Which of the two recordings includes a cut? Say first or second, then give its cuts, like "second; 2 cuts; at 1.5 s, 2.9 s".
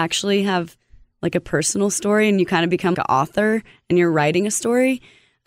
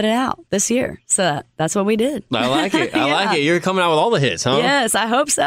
first; 1 cut; at 2.9 s